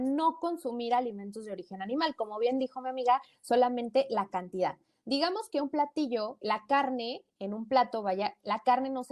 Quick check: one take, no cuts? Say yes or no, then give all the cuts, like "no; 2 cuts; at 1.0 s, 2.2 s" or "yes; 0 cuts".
no; 1 cut; at 6.4 s